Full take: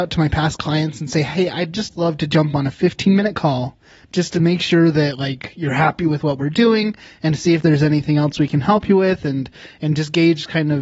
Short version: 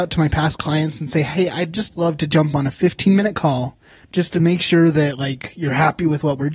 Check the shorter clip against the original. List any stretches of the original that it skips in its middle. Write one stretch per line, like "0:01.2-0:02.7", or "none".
none